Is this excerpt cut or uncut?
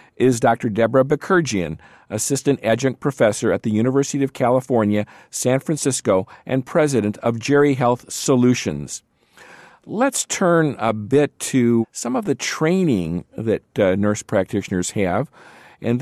uncut